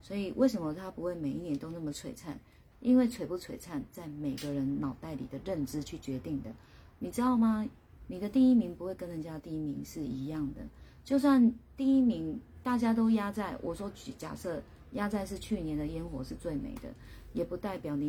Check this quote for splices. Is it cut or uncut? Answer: cut